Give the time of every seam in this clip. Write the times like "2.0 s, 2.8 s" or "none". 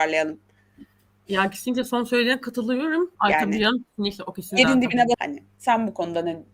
3.1 s, 5.1 s